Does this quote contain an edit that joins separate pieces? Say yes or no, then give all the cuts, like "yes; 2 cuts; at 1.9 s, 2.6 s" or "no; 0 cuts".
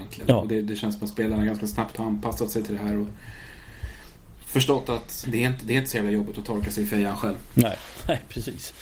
yes; 1 cut; at 5.2 s